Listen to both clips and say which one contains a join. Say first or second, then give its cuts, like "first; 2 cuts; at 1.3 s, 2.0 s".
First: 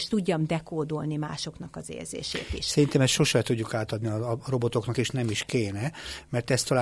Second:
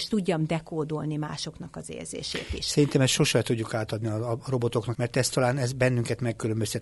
second; 1 cut; at 4.9 s